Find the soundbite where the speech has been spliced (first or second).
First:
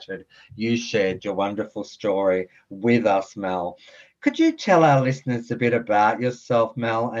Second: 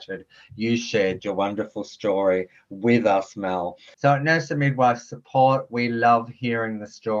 second